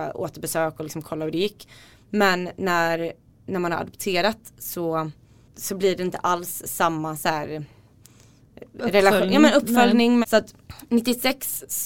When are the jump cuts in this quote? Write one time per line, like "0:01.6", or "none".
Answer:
0:10.2